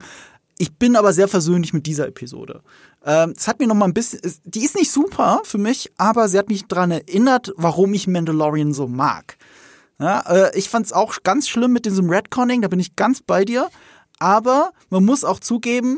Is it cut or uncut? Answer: uncut